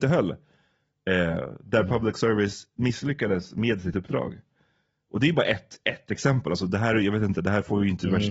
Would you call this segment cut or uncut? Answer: uncut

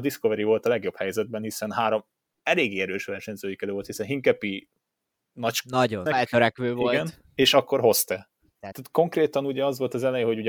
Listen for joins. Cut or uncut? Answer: cut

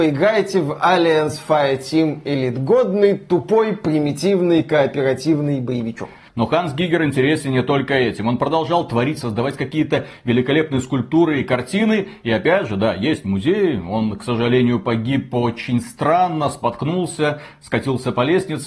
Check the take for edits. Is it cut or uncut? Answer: uncut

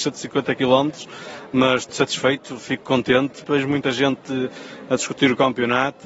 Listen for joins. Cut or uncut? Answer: cut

